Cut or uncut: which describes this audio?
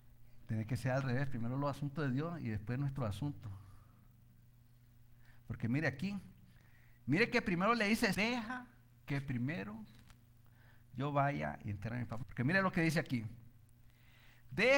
cut